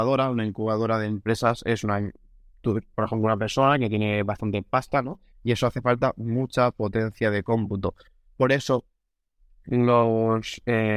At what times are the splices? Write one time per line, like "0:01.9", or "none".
0:05.3